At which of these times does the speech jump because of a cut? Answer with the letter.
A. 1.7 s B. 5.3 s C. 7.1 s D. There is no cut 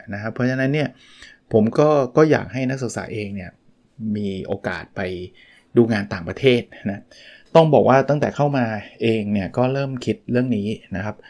A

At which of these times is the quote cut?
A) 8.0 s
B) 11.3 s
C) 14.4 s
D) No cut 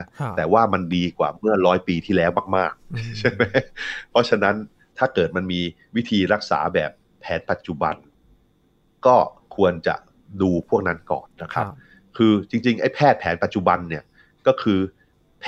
B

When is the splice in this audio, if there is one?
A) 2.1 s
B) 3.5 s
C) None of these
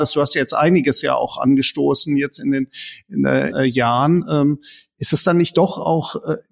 B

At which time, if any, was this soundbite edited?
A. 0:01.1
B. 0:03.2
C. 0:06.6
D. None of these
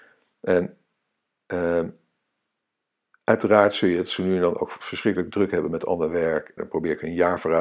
C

